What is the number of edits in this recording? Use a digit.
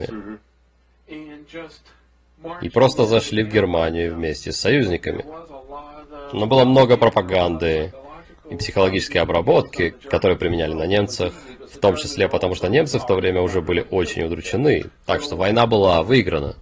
0